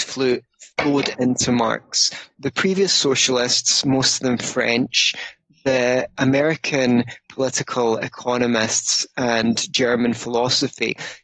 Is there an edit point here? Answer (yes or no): no